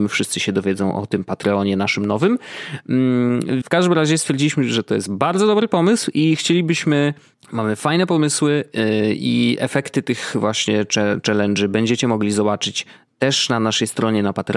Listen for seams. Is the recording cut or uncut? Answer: cut